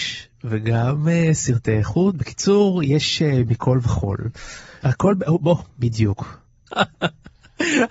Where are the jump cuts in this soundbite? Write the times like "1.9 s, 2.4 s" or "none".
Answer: 4.8 s, 6.7 s